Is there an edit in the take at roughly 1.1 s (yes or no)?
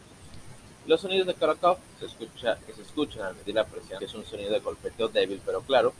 no